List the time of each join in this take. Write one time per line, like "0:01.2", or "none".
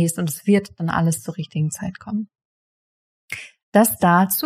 none